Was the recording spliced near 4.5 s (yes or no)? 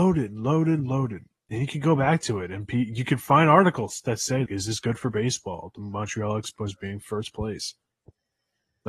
yes